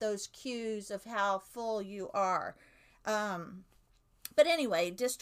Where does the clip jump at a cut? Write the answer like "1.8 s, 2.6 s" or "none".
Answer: none